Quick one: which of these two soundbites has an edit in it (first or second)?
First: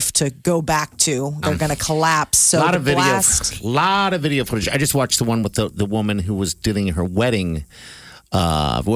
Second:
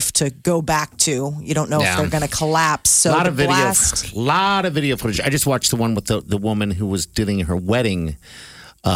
first